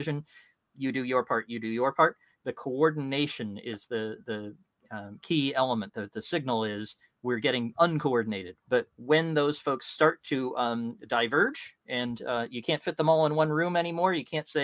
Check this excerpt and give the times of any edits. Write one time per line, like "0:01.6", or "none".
0:08.6